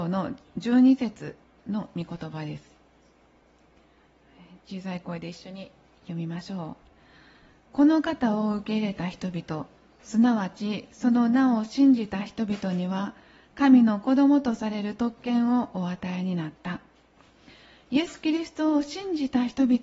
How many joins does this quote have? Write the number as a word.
zero